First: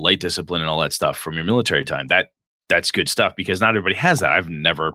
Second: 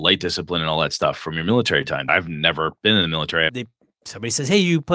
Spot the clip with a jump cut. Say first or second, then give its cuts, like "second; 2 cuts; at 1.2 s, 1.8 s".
second; 2 cuts; at 2.1 s, 3.5 s